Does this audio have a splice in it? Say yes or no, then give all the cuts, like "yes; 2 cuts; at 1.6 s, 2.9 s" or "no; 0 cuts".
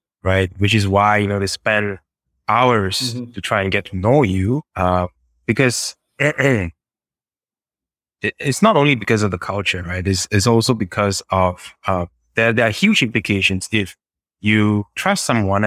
yes; 1 cut; at 4.7 s